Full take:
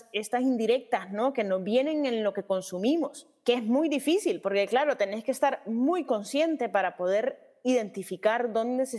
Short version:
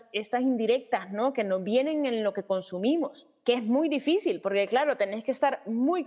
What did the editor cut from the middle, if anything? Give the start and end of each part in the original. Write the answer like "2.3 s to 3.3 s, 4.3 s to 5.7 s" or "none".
none